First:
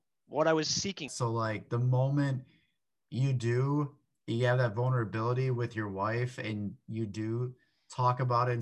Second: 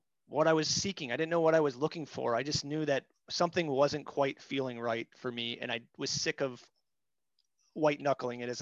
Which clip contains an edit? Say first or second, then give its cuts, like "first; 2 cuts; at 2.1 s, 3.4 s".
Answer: first; 1 cut; at 1.1 s